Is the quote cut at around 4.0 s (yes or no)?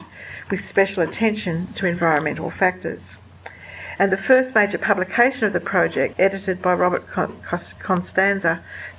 yes